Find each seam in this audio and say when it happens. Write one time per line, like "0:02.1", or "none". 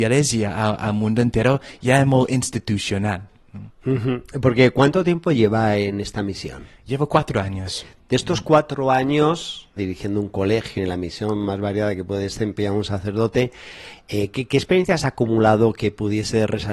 0:09.8
0:10.8